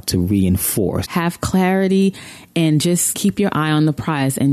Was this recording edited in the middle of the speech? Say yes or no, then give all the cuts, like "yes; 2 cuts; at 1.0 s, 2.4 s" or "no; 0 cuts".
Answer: yes; 2 cuts; at 1.0 s, 3.1 s